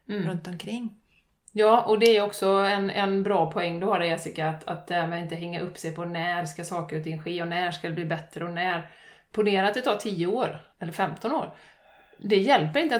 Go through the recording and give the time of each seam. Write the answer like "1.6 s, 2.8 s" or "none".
10.7 s